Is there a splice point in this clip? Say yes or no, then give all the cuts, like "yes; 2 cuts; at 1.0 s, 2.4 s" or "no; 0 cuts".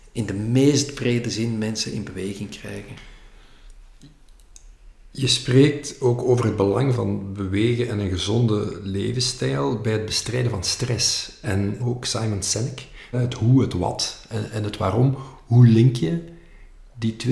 yes; 3 cuts; at 6.9 s, 11.8 s, 13.1 s